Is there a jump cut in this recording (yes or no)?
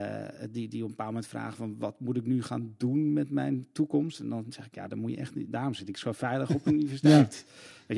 no